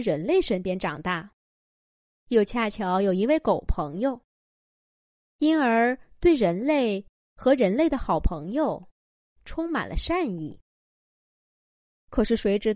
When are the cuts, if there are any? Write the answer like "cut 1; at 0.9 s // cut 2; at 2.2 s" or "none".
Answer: none